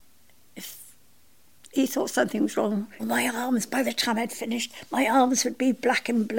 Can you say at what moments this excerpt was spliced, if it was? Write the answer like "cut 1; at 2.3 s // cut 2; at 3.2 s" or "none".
cut 1; at 3.0 s